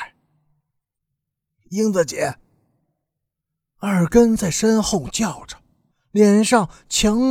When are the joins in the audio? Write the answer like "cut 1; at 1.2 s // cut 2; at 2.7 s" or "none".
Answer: cut 1; at 5.9 s